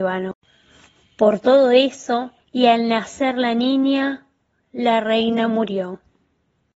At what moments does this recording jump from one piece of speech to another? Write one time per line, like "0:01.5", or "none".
0:02.4

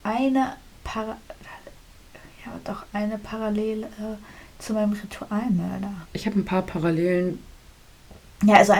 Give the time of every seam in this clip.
0:06.0

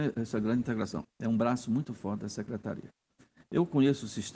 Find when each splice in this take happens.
0:01.0

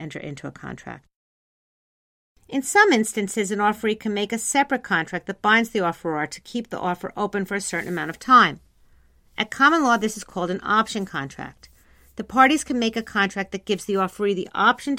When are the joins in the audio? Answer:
none

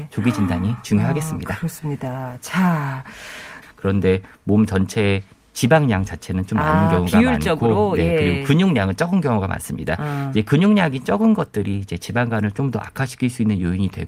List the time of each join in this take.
0:03.6

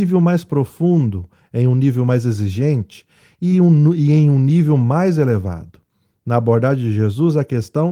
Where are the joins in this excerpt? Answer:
none

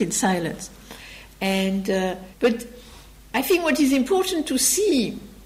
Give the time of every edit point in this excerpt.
0:01.2
0:02.3

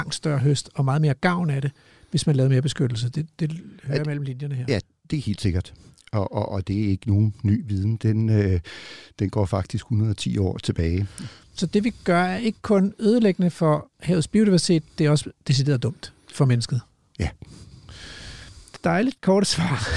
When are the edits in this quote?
none

